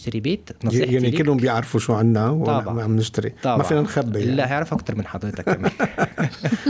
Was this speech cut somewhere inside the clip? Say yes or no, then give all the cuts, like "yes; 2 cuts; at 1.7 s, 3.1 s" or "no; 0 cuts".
no; 0 cuts